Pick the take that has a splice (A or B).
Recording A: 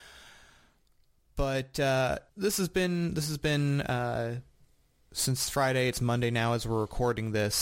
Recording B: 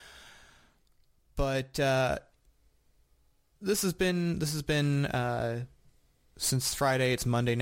A